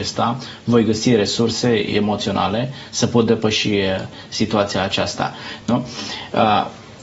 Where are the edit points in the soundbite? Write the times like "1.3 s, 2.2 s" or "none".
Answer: none